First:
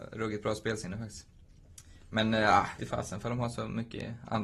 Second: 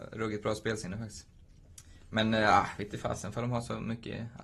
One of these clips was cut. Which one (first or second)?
first